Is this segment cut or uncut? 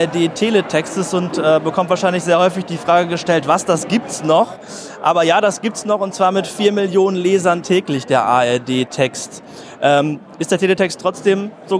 uncut